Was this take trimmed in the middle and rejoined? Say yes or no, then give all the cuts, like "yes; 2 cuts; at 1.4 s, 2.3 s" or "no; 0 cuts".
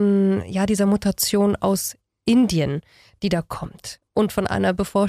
no; 0 cuts